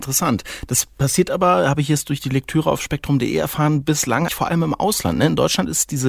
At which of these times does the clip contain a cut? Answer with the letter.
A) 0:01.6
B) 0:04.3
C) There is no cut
B